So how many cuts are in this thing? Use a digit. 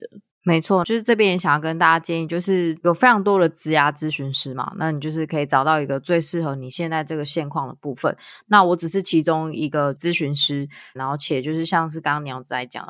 1